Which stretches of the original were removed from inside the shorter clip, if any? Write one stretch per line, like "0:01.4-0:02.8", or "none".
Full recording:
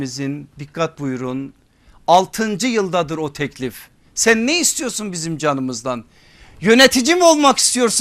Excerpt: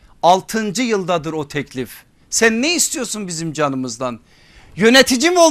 none

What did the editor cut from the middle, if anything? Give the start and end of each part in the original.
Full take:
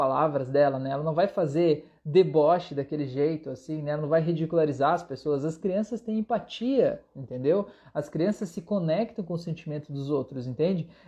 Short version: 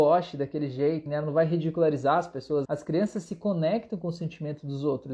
0:03.4-0:03.8
0:05.4-0:07.9

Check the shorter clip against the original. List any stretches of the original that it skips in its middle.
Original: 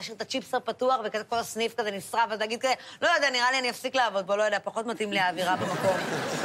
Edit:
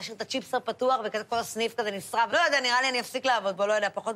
0:02.3-0:03.0

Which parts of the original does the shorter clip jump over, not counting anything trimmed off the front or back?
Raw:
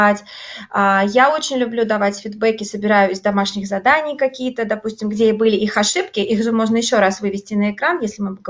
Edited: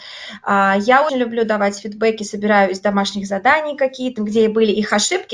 0:01.4-0:01.5
0:04.6-0:05.0

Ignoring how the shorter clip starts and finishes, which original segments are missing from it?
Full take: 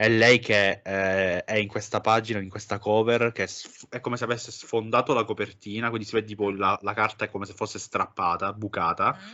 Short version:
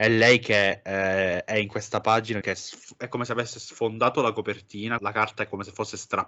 0:02.4-0:03.3
0:05.9-0:06.8

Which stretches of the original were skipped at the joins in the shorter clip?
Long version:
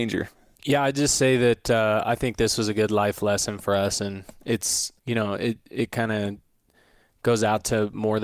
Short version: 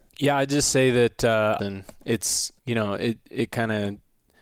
0:02.1-0:04.0

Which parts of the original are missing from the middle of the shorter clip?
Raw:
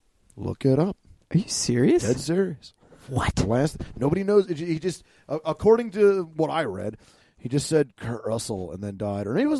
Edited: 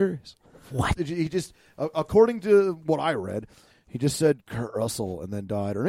0:03.3-0:04.5

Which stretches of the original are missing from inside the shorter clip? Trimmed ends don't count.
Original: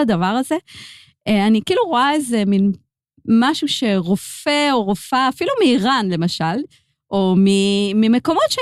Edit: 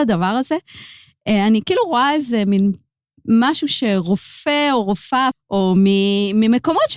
0:05.3-0:06.9

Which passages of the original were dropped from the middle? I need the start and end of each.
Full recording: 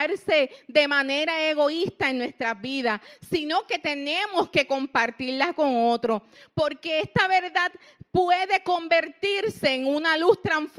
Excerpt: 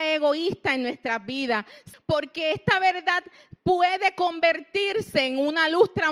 0:03.3-0:06.4

